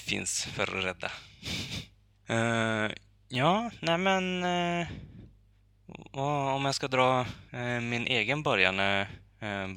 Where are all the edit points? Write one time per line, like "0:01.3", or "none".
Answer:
0:02.1
0:07.5